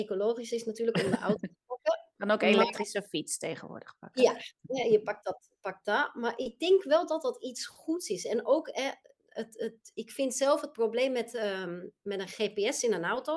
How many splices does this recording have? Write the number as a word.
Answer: zero